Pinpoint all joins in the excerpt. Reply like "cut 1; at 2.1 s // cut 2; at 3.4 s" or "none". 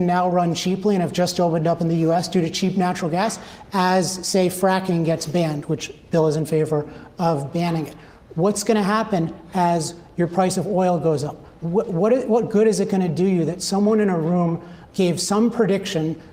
cut 1; at 11.6 s // cut 2; at 14.9 s